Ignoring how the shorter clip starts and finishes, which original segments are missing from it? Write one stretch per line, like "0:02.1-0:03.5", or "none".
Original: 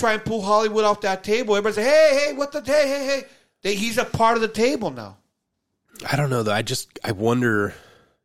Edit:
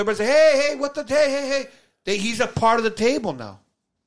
none